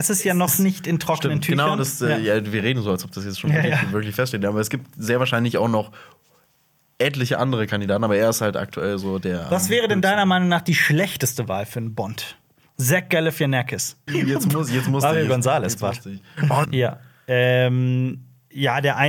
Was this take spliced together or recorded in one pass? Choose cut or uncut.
cut